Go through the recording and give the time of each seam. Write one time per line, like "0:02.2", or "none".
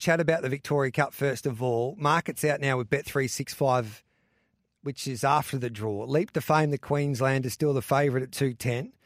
none